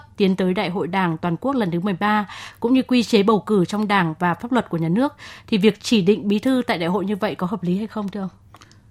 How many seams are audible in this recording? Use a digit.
0